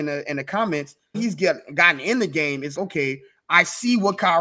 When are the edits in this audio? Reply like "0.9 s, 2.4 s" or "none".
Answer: 1.1 s, 2.8 s